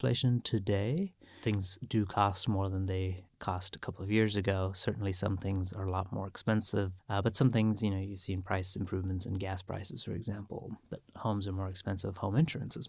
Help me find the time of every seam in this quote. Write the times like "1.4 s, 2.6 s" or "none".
none